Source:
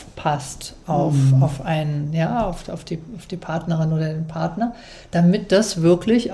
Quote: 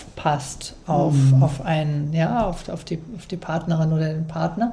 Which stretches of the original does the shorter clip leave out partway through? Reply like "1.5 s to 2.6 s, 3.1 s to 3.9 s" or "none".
none